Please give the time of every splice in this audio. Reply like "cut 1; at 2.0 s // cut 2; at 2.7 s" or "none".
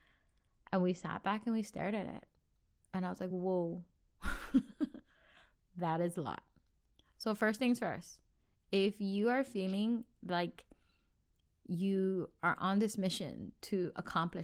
none